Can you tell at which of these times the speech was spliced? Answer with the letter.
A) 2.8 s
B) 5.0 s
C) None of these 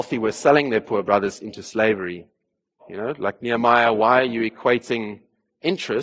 A